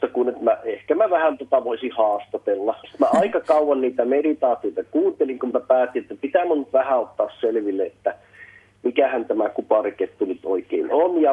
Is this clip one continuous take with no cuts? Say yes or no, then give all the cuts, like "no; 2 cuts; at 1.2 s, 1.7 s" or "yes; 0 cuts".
no; 2 cuts; at 2.8 s, 5.5 s